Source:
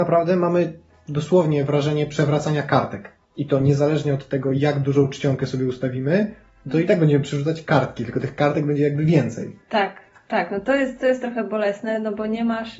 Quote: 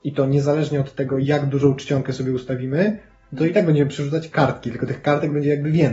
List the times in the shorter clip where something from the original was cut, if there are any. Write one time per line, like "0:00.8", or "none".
none